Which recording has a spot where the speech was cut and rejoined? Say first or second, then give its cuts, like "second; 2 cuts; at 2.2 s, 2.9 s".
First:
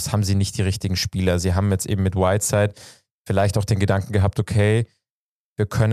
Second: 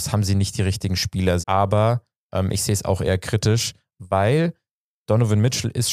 second; 1 cut; at 1.4 s